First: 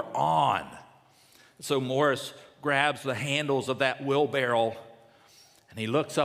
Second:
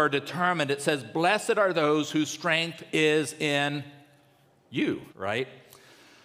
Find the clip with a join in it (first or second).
second